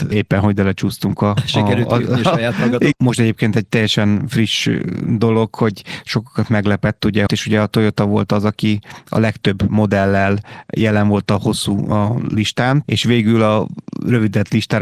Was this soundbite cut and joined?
yes; 3 cuts; at 2.9 s, 7.3 s, 12.8 s

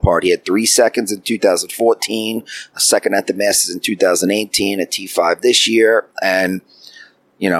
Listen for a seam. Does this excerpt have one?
no; 0 cuts

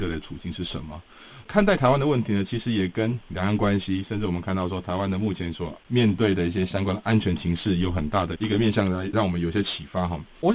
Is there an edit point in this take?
no; 0 cuts

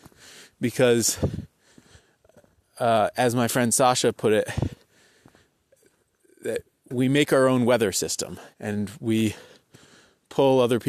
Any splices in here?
yes; 1 cut; at 8.5 s

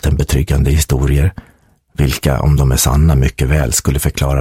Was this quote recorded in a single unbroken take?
yes; 0 cuts

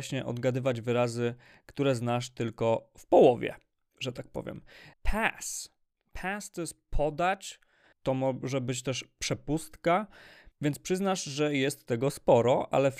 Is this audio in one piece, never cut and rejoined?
no; 3 cuts; at 4.9 s, 7.9 s, 10.5 s

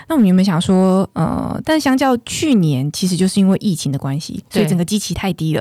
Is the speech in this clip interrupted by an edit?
yes; 1 cut; at 1.6 s

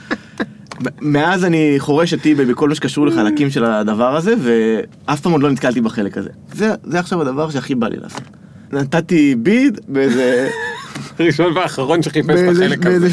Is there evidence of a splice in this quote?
yes; 3 cuts; at 6.3 s, 8.7 s, 9.8 s

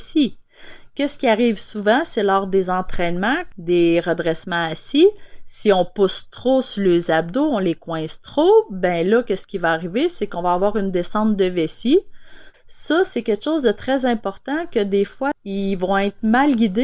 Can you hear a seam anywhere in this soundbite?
yes; 3 cuts; at 3.5 s, 12.5 s, 15.3 s

